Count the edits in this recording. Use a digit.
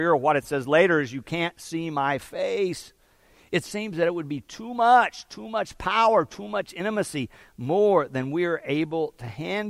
0